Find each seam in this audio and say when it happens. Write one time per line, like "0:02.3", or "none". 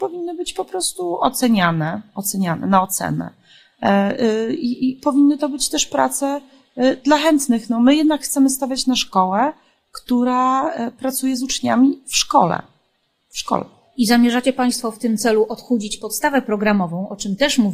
none

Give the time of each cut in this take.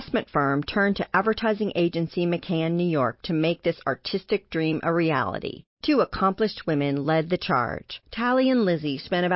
0:05.7
0:08.0

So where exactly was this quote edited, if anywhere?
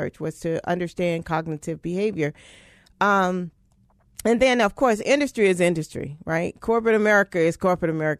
none

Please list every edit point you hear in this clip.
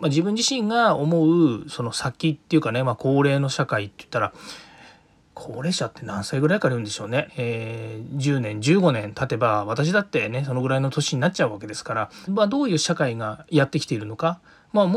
0:07.3
0:12.3

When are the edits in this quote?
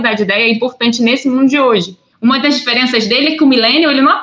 0:02.1

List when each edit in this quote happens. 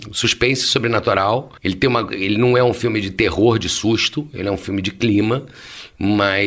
none

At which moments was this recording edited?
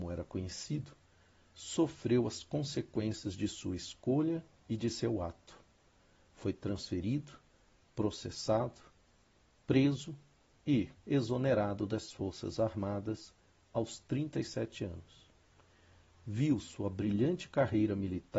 0:10.9

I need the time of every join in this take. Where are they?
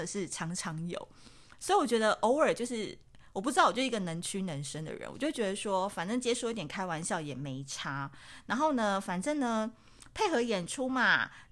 none

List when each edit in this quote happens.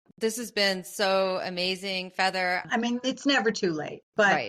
0:02.6

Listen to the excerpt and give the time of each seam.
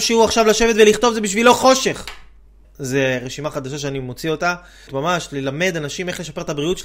0:02.6
0:04.9

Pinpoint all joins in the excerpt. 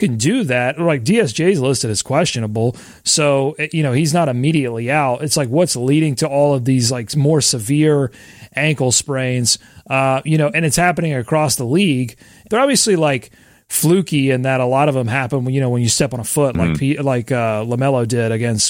0:12.5

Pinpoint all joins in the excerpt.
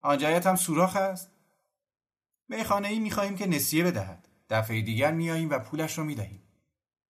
none

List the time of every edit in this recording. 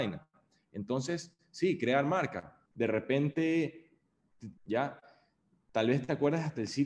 0:02.7
0:04.6

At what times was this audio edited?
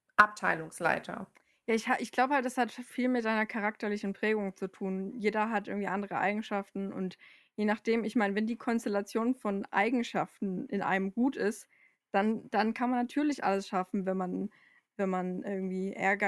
none

